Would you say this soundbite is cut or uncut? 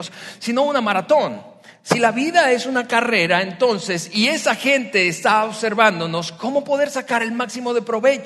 uncut